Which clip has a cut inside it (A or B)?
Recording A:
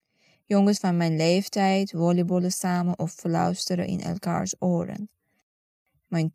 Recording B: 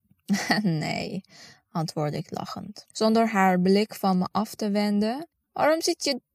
B